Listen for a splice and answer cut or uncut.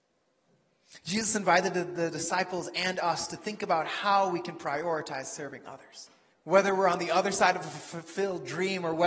cut